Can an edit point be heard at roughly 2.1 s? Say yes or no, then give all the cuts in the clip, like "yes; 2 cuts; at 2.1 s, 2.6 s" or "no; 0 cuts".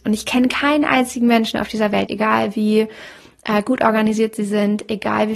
yes; 1 cut; at 2.1 s